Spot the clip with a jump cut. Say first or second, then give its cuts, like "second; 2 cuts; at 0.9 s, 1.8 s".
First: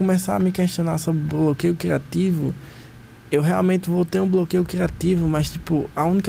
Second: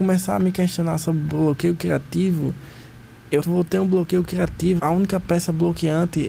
second; 2 cuts; at 3.4 s, 4.8 s